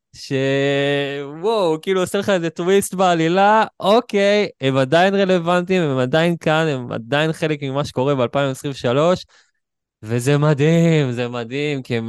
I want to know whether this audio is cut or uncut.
uncut